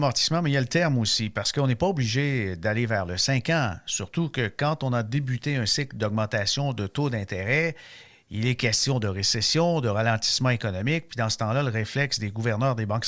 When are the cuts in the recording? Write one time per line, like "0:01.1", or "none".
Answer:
none